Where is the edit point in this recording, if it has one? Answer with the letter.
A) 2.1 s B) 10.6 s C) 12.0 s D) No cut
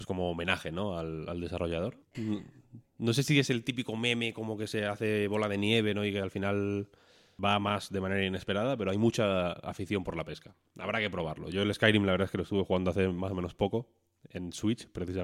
A